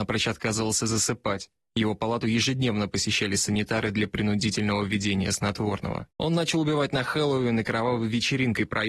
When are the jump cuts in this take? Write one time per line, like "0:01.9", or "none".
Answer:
0:06.1